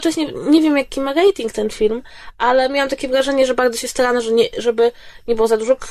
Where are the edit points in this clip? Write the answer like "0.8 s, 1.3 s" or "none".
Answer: none